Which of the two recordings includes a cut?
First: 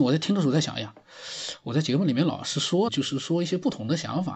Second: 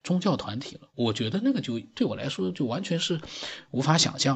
first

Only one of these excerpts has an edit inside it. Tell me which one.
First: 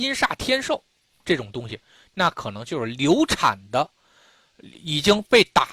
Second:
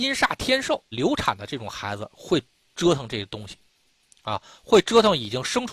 second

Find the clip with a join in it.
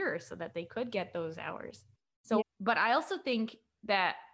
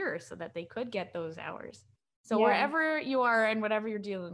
first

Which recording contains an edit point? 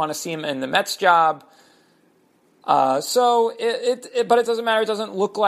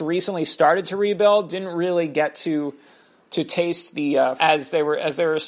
second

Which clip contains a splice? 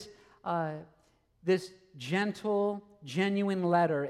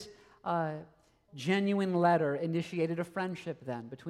second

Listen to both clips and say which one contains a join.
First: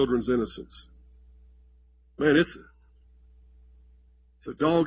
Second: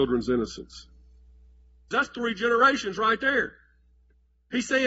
second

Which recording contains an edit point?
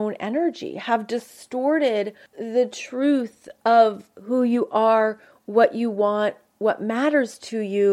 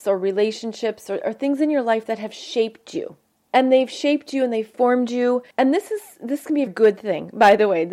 second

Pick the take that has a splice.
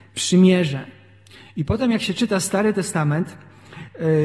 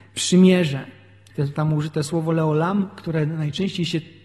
second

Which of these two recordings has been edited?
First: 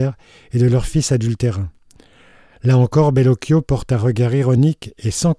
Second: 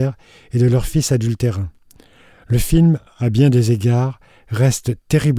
second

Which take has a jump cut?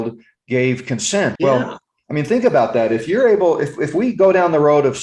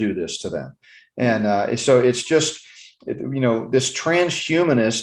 first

